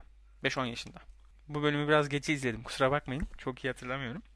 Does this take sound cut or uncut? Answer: cut